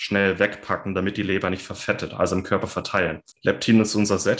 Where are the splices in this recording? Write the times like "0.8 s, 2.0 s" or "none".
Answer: 3.3 s